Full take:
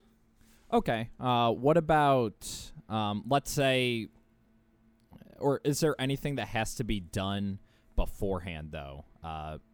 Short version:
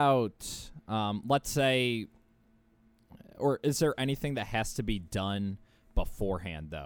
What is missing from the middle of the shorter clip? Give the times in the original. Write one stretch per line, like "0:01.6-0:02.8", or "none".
none